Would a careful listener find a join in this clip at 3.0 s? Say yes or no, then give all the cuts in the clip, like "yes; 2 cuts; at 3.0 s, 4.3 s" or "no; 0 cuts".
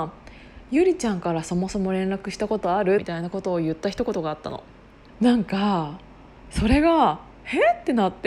yes; 2 cuts; at 3.0 s, 5.1 s